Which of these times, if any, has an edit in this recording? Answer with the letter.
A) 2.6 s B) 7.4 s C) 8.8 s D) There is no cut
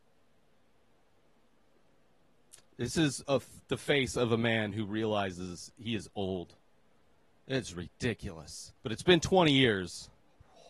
C